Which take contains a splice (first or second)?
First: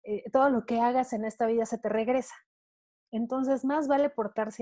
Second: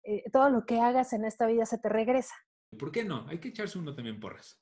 second